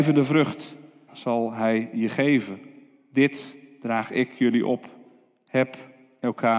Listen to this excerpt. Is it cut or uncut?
cut